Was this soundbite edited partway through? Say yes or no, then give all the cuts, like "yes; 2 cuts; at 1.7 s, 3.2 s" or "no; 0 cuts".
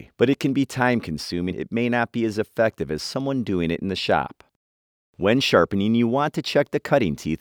yes; 1 cut; at 1.5 s